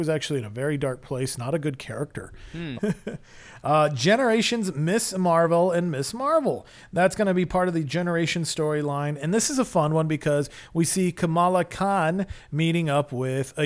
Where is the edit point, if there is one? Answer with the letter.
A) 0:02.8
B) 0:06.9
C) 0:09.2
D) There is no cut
A